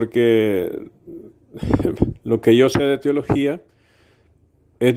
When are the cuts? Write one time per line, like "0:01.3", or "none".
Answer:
none